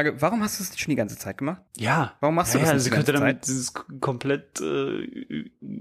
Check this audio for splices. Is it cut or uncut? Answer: cut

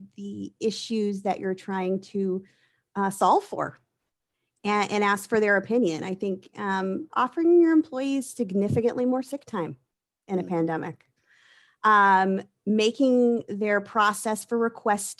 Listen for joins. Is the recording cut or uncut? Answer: cut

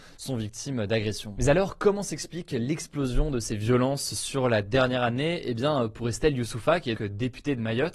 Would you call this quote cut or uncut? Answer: cut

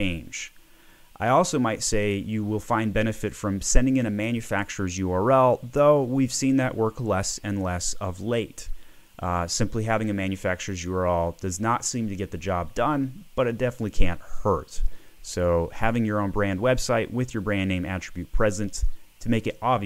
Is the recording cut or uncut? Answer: uncut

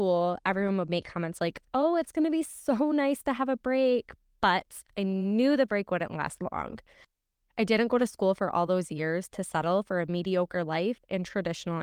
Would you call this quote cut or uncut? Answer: uncut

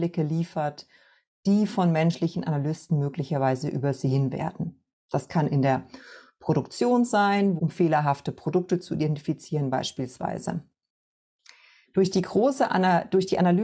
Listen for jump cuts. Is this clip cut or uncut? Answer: cut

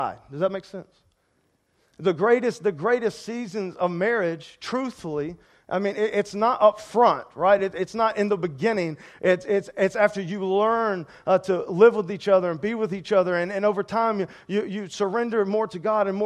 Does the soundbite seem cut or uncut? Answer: uncut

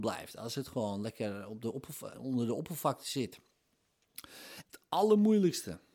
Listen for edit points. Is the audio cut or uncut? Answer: cut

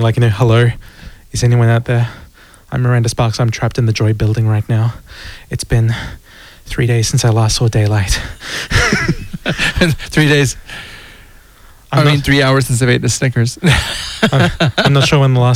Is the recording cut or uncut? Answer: uncut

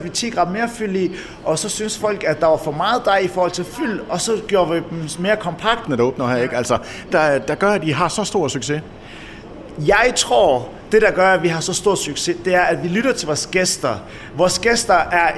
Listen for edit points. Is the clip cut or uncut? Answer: cut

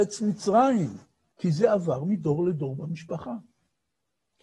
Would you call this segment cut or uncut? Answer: cut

